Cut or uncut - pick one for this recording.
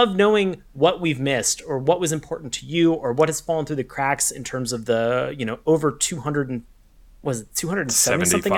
uncut